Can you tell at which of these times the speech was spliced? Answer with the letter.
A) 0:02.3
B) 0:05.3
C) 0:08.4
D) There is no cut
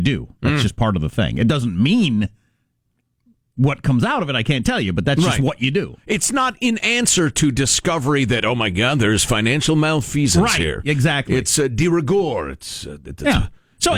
D